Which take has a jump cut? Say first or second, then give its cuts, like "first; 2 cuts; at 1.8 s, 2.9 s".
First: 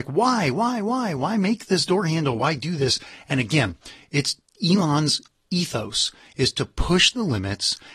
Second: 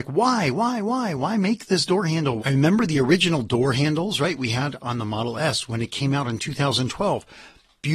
second; 1 cut; at 2.4 s